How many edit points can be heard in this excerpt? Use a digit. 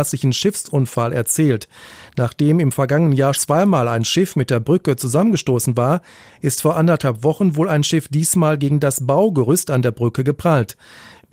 1